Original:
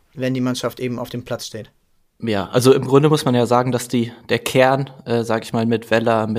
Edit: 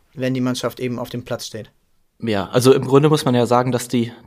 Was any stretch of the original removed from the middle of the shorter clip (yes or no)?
no